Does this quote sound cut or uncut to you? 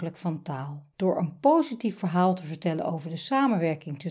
cut